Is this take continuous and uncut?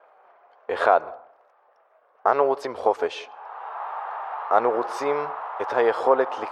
yes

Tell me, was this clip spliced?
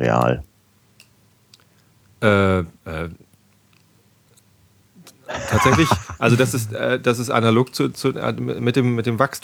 no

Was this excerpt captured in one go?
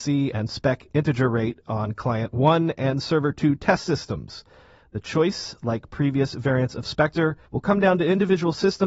no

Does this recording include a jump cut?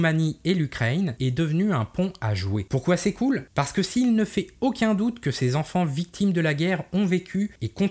yes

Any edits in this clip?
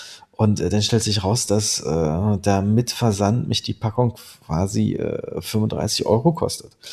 no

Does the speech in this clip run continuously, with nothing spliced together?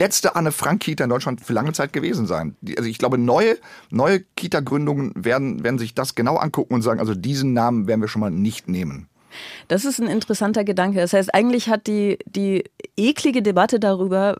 yes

